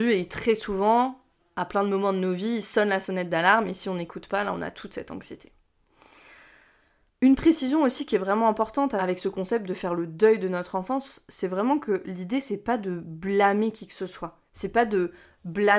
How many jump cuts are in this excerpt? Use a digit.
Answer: 0